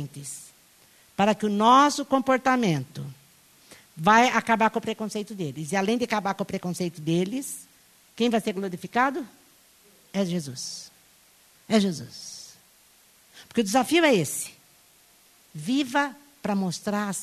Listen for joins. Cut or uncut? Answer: uncut